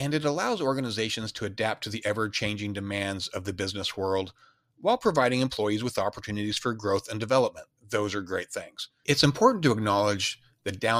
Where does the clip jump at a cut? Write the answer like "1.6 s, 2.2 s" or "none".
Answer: 7.8 s, 9.0 s